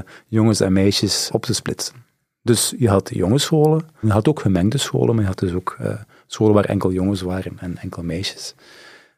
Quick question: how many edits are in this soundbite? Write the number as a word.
two